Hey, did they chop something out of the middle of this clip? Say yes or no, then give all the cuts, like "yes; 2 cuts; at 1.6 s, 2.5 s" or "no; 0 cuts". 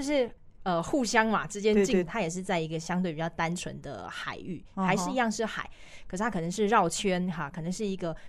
yes; 1 cut; at 2.1 s